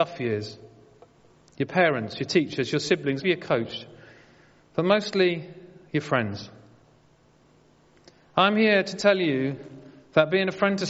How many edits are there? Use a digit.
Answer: 1